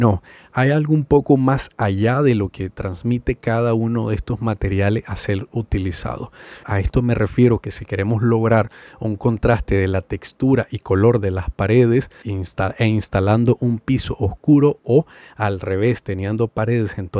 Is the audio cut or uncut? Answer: cut